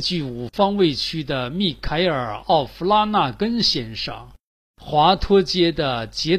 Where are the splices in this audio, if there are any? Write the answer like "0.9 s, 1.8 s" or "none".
none